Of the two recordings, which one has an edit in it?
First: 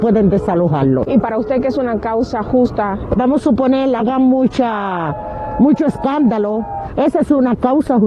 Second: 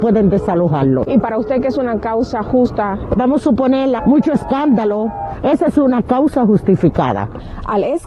second; 1 cut; at 4.0 s

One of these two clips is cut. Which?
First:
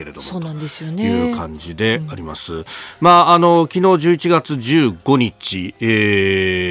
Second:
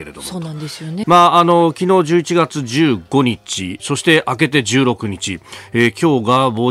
second; 2 cuts; at 1.0 s, 3.8 s

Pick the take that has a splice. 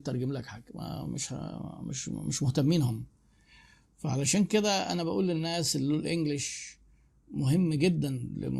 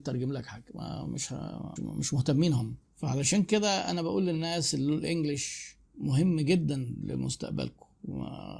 second; 3 cuts; at 1.8 s, 2.8 s, 5.9 s

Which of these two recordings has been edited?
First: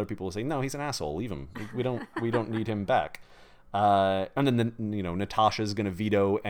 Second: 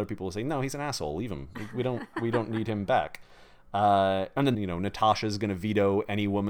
second; 1 cut; at 4.5 s

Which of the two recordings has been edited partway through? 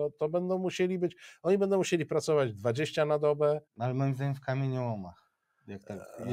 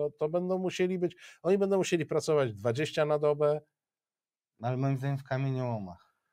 first; 1 cut; at 3.7 s

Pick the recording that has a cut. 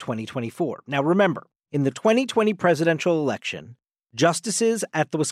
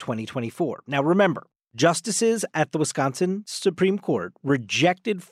second; 1 cut; at 1.6 s

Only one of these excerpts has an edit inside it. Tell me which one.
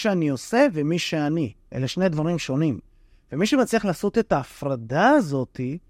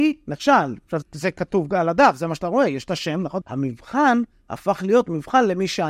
second; 2 cuts; at 1.0 s, 3.4 s

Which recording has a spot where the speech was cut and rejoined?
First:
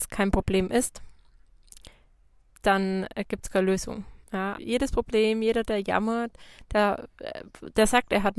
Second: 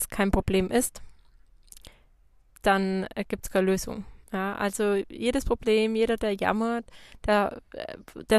first; 1 cut; at 4.5 s

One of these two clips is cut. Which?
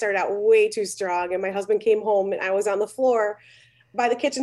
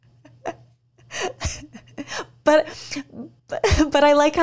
second; 1 cut; at 3.4 s

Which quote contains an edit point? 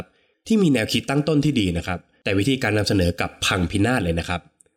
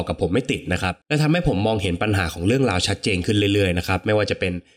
second; 1 cut; at 1.0 s

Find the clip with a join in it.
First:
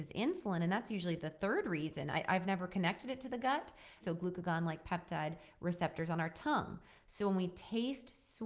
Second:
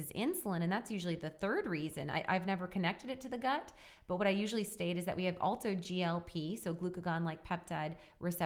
first; 1 cut; at 4.0 s

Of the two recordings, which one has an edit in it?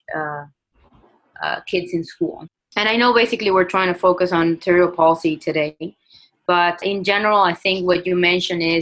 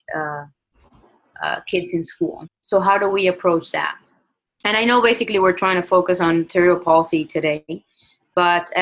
first; 2 cuts; at 2.5 s, 6.8 s

